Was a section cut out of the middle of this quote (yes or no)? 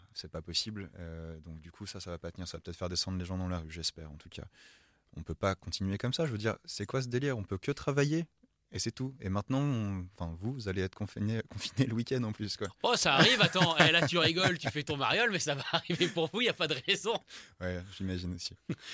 yes